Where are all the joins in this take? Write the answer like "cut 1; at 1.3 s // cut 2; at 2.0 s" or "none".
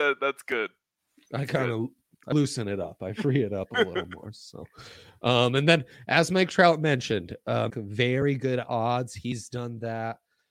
cut 1; at 7.7 s